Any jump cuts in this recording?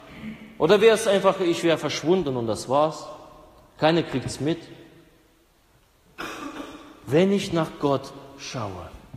no; 0 cuts

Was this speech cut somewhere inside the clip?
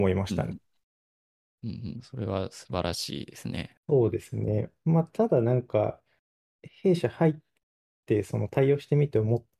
yes; 2 cuts; at 1.6 s, 3.8 s

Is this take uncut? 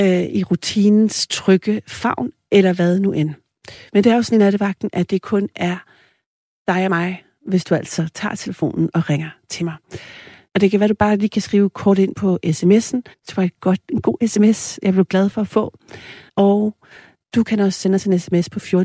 no; 3 cuts; at 10.5 s, 13.1 s, 16.3 s

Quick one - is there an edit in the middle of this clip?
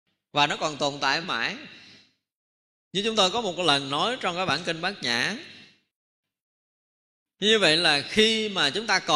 yes; 1 cut; at 1.2 s

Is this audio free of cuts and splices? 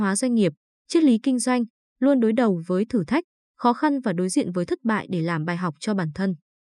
yes; 0 cuts

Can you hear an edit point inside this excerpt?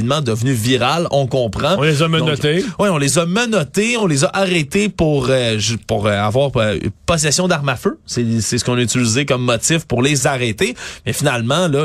no; 0 cuts

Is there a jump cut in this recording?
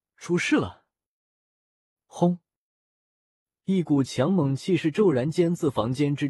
no; 0 cuts

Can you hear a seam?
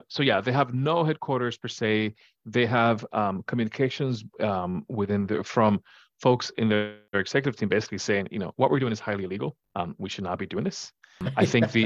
no; 0 cuts

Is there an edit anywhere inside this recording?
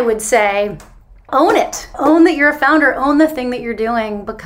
no; 0 cuts

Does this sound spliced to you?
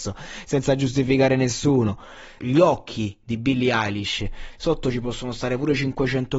yes; 2 cuts; at 2.4 s, 4.5 s

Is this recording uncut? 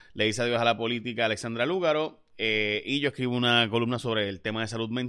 yes; 0 cuts

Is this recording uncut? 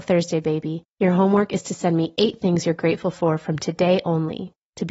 yes; 0 cuts

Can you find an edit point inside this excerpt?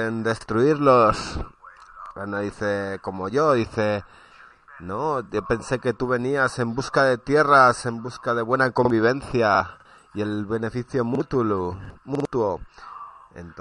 no; 0 cuts

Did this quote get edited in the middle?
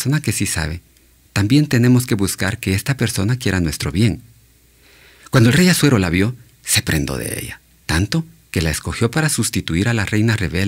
no; 0 cuts

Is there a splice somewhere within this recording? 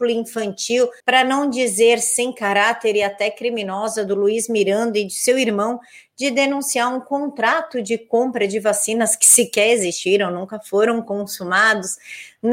yes; 1 cut; at 1.0 s

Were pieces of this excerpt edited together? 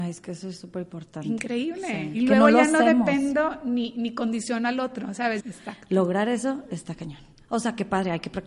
yes; 1 cut; at 5.4 s

